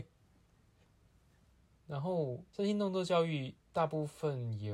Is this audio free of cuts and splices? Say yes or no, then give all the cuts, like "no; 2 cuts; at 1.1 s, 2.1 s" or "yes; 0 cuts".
yes; 0 cuts